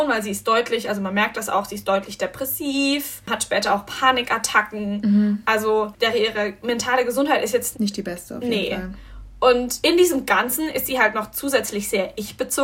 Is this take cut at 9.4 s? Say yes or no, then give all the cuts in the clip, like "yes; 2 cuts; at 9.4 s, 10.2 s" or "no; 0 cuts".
no; 1 cut; at 7.7 s